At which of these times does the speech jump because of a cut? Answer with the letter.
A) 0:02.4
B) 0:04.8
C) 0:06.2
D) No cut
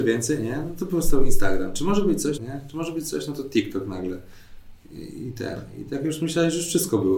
A